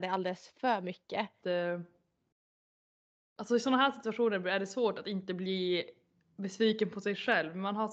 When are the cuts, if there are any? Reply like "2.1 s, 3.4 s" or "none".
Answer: 1.4 s

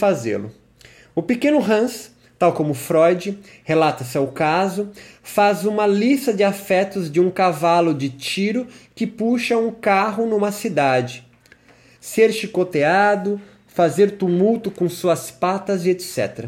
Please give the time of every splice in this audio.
12.0 s

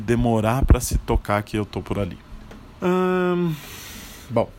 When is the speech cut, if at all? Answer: 2.8 s

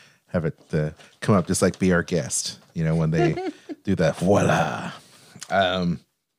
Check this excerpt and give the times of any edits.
none

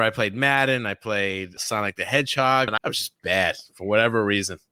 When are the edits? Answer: 1.6 s, 2.7 s

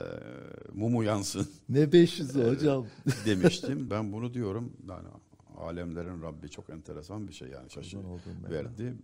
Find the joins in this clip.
3.9 s

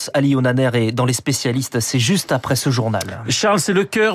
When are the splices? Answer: none

